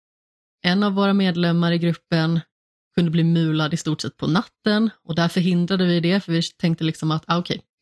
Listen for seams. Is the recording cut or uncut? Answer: uncut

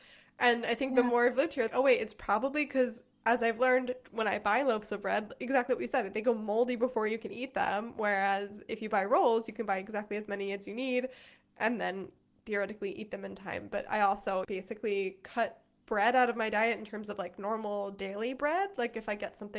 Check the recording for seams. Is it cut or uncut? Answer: cut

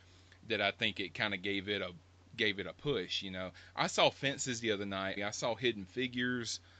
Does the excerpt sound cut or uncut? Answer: cut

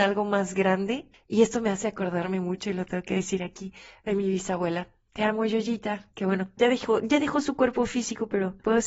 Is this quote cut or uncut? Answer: cut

